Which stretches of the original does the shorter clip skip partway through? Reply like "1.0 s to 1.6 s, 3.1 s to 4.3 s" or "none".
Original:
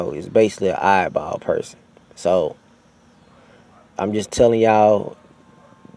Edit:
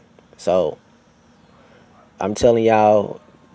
4.1 s to 4.3 s